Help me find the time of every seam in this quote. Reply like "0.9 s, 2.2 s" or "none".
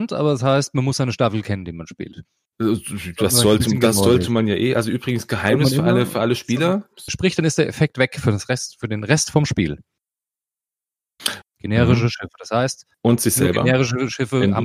7.1 s, 11.4 s